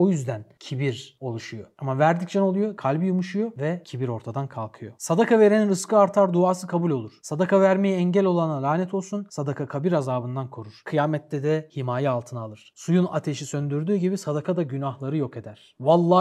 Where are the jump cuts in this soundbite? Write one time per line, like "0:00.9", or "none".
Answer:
0:12.7